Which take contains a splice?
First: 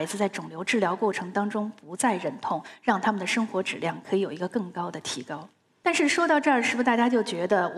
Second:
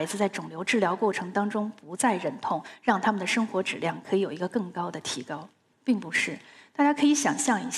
second; 1 cut; at 5.7 s

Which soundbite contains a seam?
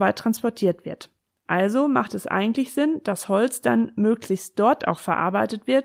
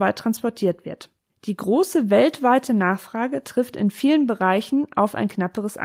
second; 1 cut; at 1.3 s

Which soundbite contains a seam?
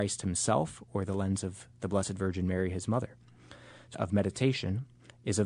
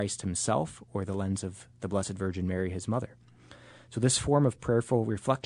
first; 1 cut; at 3.9 s

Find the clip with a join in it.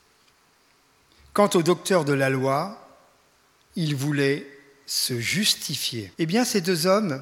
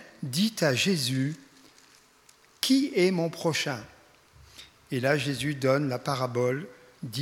first; 1 cut; at 6.1 s

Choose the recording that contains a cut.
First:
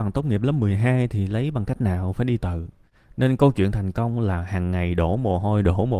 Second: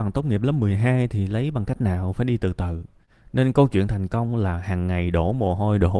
first; 1 cut; at 2.4 s

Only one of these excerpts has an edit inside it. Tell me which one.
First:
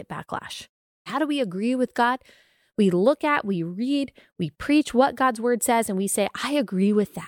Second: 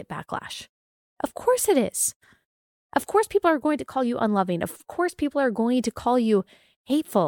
first; 1 cut; at 1.1 s

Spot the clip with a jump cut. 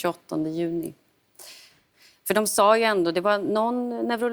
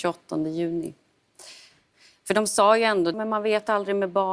second; 1 cut; at 3.1 s

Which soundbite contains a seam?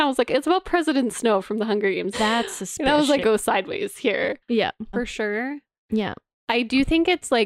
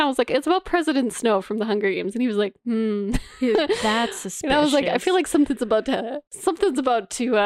first; 3 cuts; at 2.1 s, 3.2 s, 4.9 s

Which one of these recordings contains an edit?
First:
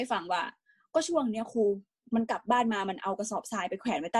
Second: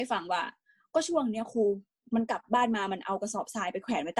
first; 1 cut; at 2.4 s

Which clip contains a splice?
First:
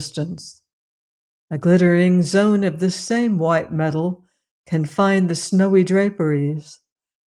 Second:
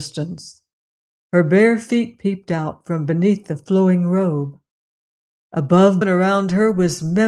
second; 2 cuts; at 1.2 s, 6.0 s

